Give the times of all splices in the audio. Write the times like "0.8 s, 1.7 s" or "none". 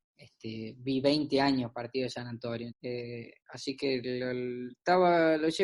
2.7 s